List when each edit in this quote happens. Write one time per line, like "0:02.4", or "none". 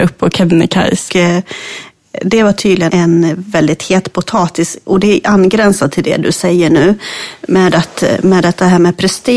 0:01.1
0:02.9